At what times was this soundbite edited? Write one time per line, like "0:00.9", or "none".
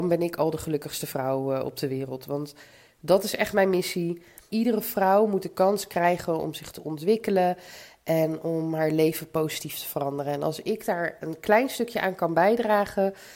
0:04.5